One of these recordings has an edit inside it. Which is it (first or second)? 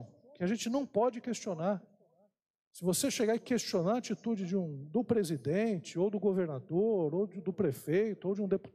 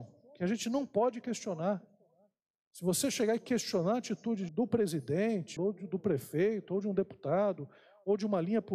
second